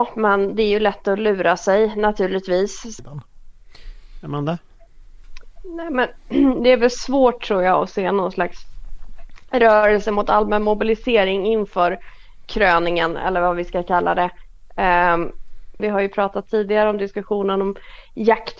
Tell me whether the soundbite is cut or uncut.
cut